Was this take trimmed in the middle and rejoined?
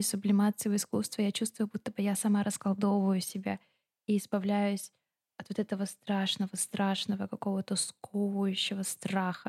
no; 0 cuts

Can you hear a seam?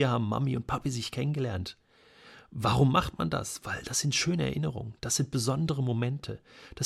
no; 0 cuts

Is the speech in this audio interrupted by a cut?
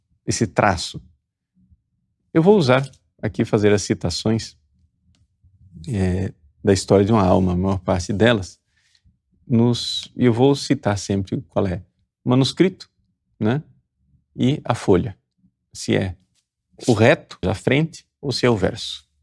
yes; 1 cut; at 17.4 s

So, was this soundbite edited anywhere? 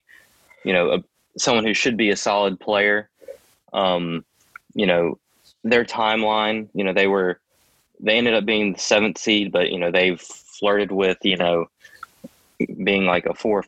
no; 0 cuts

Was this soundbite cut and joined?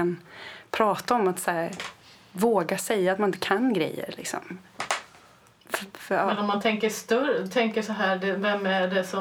no; 0 cuts

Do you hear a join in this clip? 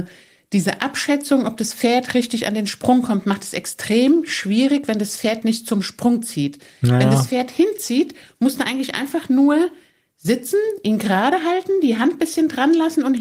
no; 0 cuts

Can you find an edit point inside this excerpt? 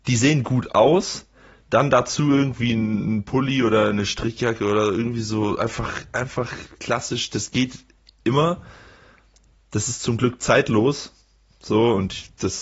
no; 0 cuts

